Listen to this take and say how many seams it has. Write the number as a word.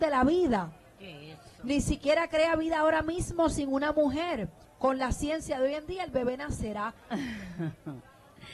two